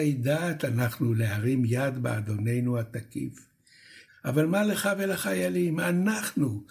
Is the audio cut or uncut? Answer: cut